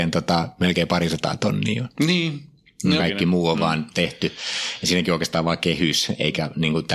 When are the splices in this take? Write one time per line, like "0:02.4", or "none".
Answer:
0:03.0